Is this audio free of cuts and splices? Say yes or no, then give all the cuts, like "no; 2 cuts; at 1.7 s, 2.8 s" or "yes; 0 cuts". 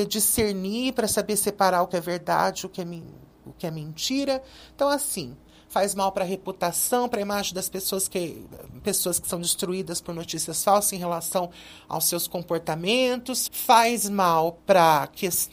no; 1 cut; at 13.5 s